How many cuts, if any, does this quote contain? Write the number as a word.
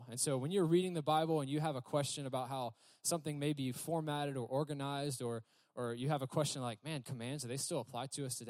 one